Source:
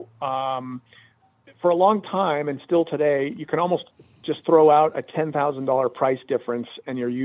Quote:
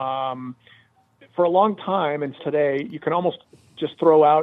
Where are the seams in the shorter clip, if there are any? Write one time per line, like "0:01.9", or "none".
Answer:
0:02.4